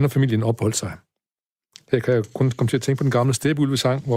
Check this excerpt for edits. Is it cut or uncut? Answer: uncut